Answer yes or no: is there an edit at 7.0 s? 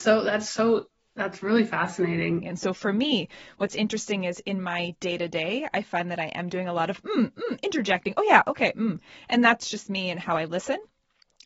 no